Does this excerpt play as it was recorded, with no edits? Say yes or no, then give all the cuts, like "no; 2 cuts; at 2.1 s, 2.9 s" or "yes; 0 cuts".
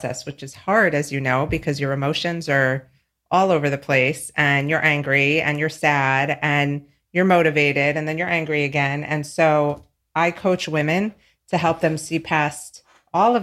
yes; 0 cuts